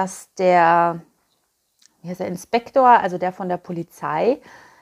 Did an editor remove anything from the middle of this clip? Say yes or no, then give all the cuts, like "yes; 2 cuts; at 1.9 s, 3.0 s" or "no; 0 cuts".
no; 0 cuts